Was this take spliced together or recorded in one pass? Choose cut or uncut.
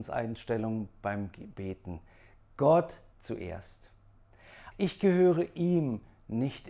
cut